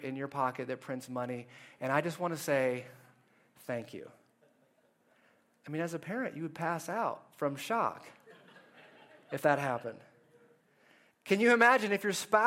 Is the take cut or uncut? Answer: uncut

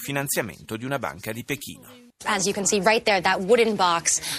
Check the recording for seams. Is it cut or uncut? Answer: uncut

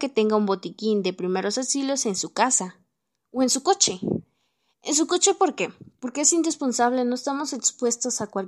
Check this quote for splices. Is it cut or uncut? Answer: uncut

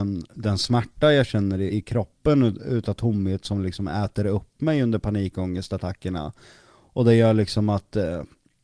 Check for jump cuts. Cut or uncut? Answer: cut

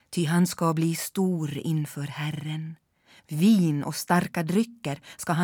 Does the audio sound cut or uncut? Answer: uncut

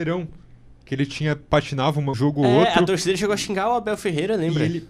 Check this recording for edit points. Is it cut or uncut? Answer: cut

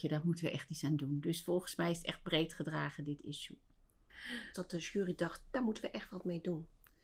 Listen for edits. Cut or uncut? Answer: cut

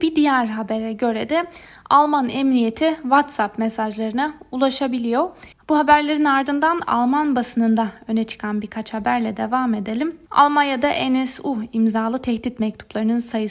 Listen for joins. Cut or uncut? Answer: cut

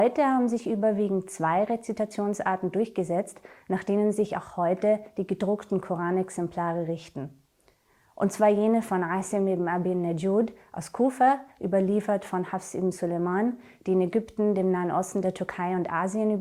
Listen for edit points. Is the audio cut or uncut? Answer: uncut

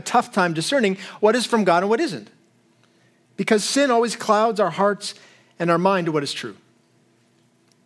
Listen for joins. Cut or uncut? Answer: uncut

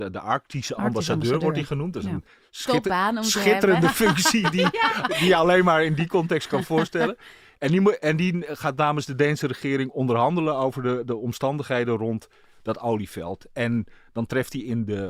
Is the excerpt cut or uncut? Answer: uncut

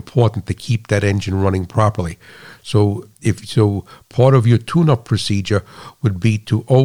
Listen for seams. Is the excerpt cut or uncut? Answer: uncut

